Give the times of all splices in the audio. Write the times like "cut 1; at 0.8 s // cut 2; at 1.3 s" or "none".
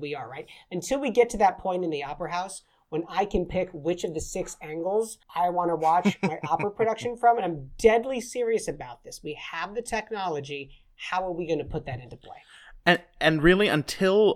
cut 1; at 5.2 s